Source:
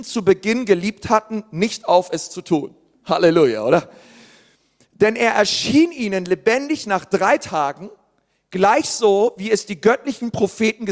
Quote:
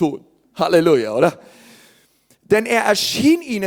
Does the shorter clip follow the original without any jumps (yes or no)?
yes